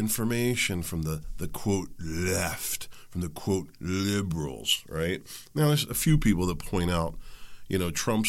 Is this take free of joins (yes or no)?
yes